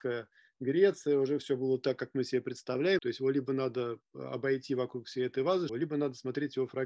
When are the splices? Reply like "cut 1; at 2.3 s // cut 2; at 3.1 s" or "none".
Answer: cut 1; at 3.0 s // cut 2; at 5.7 s